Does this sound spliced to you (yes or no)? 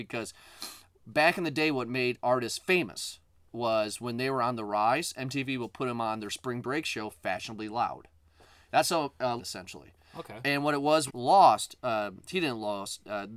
yes